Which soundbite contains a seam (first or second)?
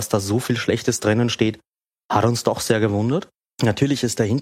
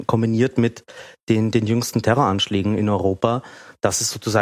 first